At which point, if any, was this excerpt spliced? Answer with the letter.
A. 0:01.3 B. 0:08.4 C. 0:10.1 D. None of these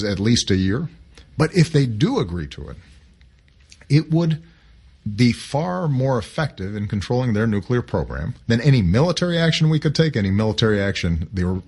B